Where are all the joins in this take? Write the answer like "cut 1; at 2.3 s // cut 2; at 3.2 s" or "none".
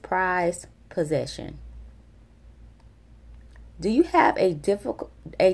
none